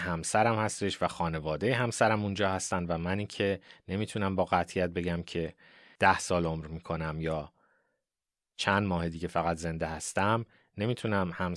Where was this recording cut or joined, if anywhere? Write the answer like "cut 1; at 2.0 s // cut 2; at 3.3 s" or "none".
none